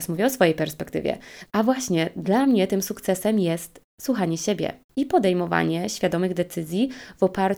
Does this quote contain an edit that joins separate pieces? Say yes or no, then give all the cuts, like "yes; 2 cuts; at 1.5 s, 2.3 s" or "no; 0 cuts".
yes; 2 cuts; at 1.5 s, 4.9 s